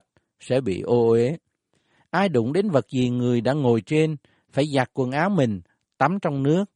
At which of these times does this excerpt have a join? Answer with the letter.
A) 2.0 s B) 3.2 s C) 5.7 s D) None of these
A